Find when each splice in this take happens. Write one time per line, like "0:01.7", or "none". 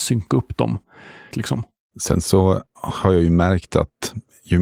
0:01.3